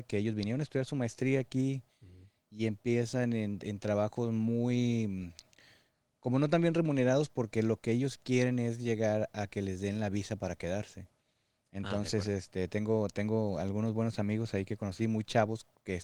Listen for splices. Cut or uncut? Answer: uncut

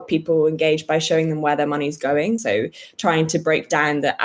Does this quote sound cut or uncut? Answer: uncut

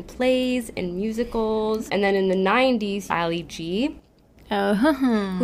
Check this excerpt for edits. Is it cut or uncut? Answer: cut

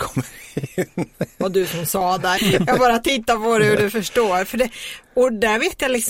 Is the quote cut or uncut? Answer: cut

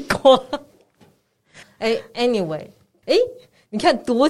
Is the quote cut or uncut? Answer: cut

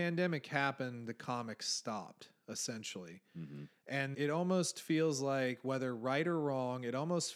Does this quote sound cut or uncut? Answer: cut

